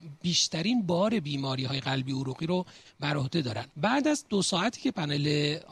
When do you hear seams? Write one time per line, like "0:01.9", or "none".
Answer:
0:03.7

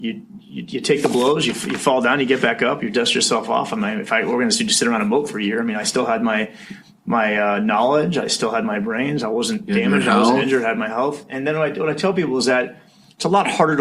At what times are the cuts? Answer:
none

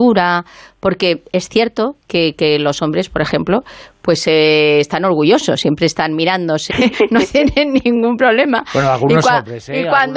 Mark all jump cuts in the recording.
0:06.7

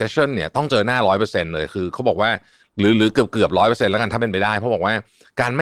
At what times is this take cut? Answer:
none

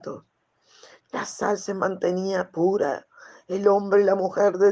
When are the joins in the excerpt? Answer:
0:01.0

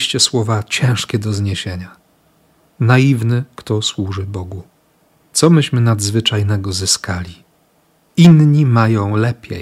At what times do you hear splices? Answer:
none

